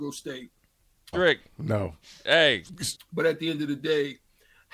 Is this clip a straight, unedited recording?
no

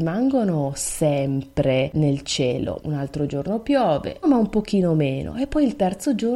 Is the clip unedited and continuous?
no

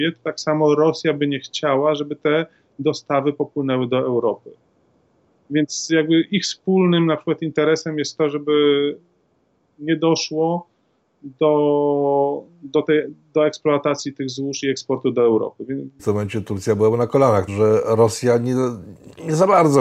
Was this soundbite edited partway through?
yes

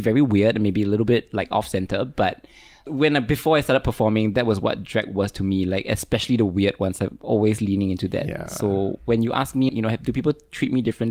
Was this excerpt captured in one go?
no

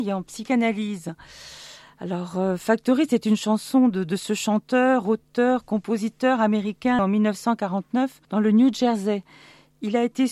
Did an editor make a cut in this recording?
yes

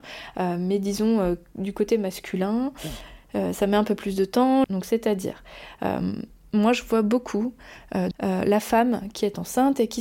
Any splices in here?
yes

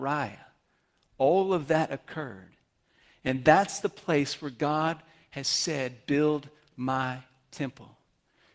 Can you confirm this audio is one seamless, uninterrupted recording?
yes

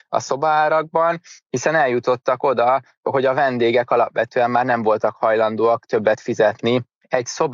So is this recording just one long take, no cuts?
yes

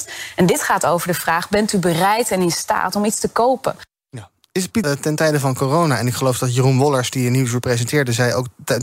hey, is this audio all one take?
no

